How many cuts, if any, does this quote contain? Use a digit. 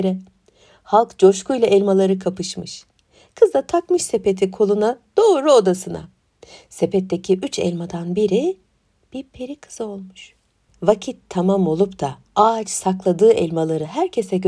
2